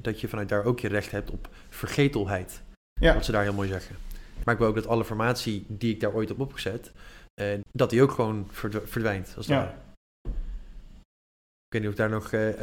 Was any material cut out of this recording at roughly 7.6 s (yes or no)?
yes